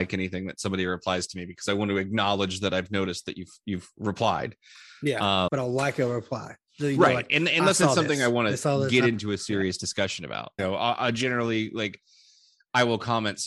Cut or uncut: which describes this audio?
cut